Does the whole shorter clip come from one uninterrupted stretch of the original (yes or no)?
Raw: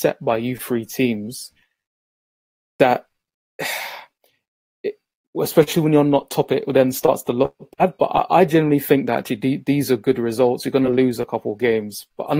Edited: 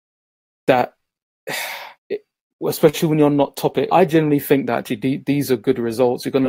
no